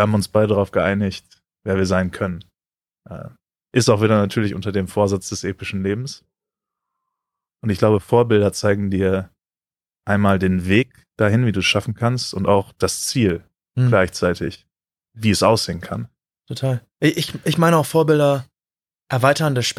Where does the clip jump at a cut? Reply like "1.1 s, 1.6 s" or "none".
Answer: none